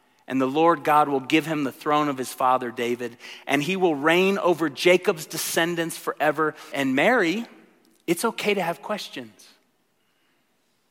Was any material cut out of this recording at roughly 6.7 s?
yes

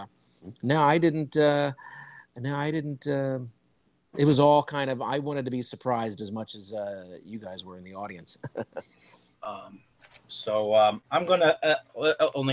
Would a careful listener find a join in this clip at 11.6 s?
no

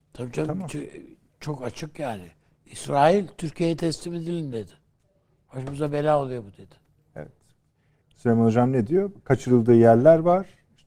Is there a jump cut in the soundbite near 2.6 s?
no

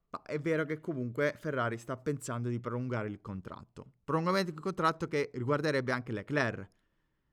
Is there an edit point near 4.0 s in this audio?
no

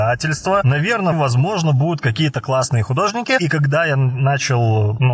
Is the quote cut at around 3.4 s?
no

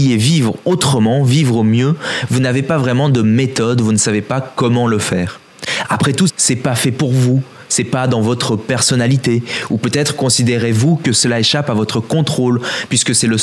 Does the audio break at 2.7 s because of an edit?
no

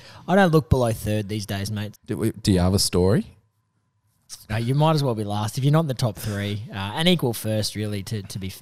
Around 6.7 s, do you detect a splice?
no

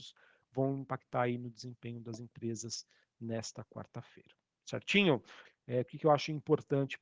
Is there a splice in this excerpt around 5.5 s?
yes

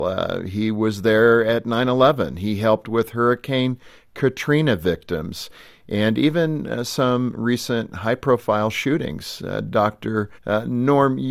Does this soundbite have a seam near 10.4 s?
yes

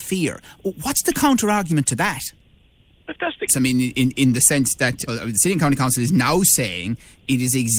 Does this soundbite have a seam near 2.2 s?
no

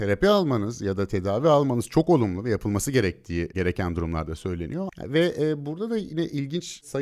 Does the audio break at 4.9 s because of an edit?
yes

